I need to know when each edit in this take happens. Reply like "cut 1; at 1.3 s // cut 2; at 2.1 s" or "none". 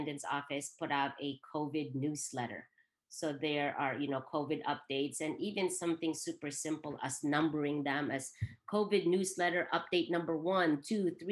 none